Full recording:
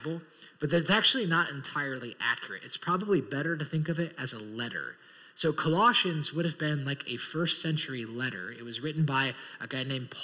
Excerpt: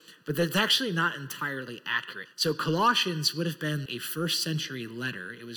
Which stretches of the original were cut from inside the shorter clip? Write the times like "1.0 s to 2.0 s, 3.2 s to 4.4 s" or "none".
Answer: 2.6 s to 5.2 s, 6.8 s to 7.0 s